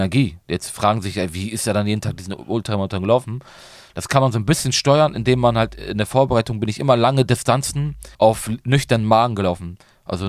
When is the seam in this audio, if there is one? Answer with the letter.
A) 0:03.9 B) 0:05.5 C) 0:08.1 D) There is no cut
C